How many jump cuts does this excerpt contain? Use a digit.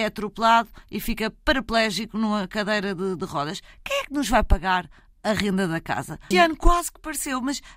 1